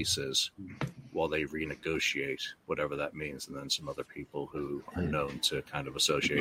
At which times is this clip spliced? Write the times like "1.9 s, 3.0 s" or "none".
none

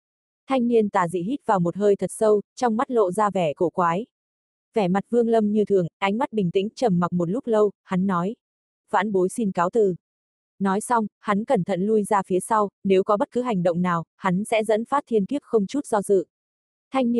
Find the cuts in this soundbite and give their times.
8.8 s

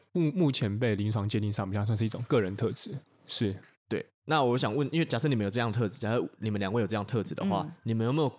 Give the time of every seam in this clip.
3.0 s

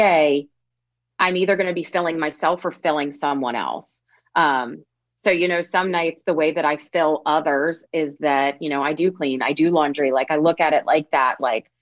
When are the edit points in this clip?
none

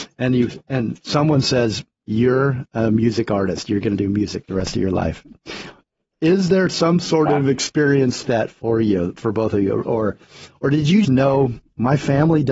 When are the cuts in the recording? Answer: 8.2 s, 9.8 s, 11.0 s

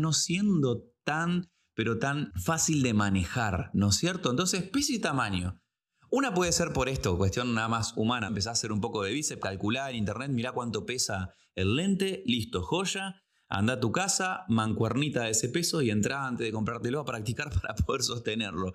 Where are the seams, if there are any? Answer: 8.3 s

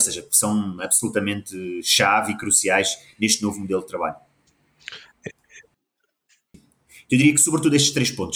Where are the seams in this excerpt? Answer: 6.5 s

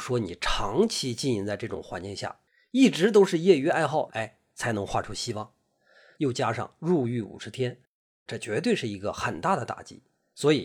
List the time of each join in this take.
4.1 s, 6.1 s, 8.3 s

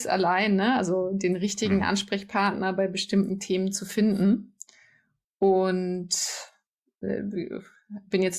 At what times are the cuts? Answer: none

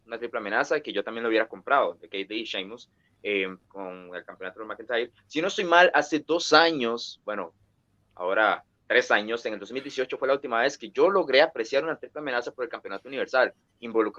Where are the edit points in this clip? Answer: none

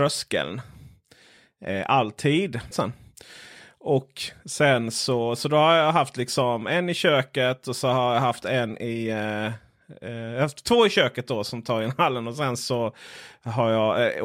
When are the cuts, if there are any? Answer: 2.7 s

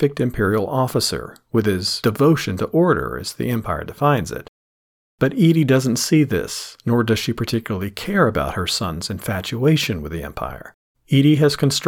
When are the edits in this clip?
10.9 s

